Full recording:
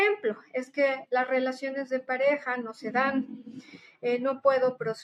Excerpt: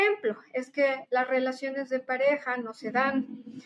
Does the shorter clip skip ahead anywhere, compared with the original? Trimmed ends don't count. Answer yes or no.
no